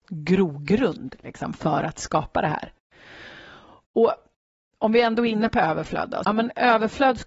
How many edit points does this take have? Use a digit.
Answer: 1